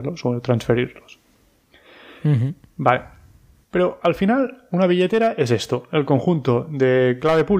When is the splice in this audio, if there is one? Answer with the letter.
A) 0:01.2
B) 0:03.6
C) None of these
B